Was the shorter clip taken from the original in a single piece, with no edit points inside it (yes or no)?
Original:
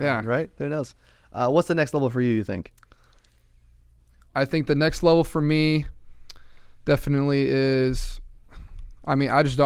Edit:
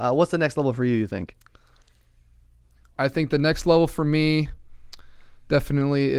yes